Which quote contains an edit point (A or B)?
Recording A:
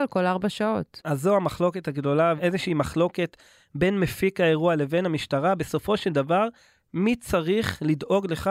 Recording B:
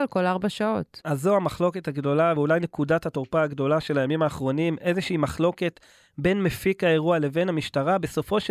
A